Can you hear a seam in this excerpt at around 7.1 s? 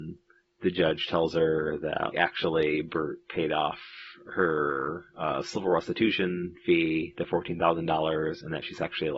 no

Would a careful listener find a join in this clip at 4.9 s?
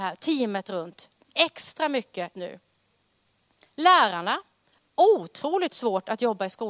no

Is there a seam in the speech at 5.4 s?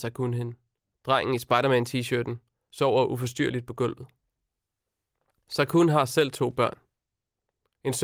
no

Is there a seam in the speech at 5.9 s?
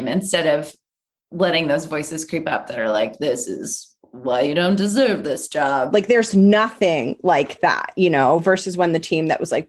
yes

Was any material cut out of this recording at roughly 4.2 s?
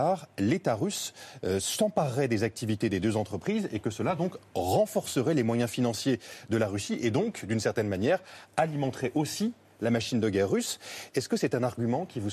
no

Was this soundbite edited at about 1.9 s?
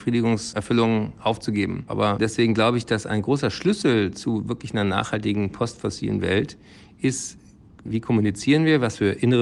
yes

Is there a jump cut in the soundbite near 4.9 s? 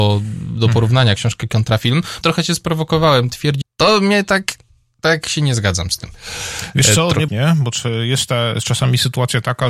no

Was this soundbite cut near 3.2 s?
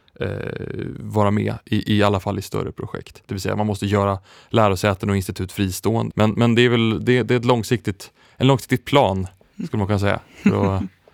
yes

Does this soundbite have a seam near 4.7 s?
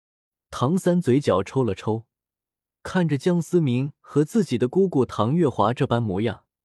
no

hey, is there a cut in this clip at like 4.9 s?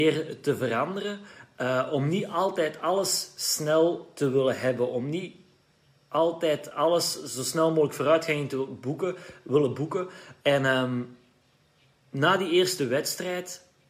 no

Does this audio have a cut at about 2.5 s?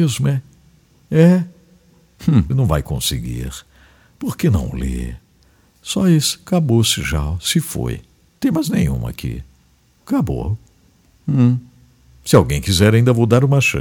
yes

